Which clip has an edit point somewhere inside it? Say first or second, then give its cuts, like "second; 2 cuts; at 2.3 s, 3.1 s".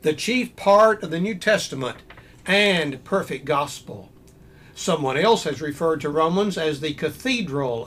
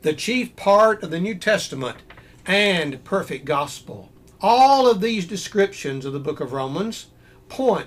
second; 1 cut; at 4.3 s